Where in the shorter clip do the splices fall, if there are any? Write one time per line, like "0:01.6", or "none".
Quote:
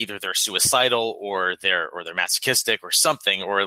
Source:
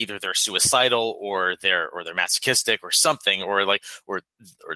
none